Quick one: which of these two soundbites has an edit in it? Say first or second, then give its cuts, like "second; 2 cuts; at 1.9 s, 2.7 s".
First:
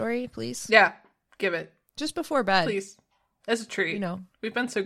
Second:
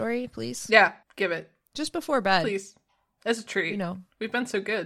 second; 1 cut; at 1.0 s